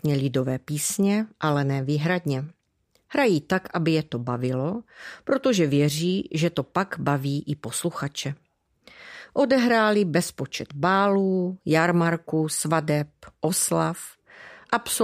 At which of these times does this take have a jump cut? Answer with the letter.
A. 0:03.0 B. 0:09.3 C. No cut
C